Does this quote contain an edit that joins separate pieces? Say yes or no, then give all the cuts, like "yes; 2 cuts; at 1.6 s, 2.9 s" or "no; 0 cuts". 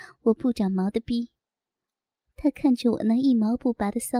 no; 0 cuts